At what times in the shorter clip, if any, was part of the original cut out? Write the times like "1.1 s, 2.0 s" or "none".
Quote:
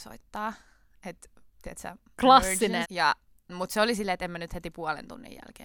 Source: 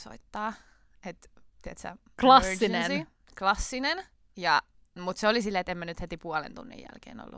2.8 s